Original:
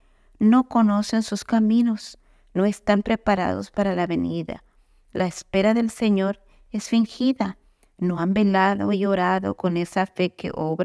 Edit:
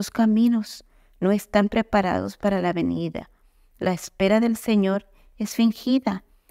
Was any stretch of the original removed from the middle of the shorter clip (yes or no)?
no